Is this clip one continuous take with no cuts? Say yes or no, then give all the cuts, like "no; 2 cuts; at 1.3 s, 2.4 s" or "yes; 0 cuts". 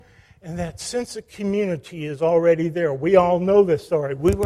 yes; 0 cuts